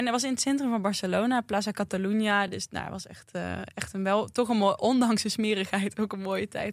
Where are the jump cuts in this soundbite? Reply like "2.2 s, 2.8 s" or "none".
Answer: none